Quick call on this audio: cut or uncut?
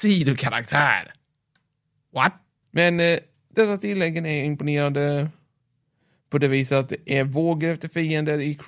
cut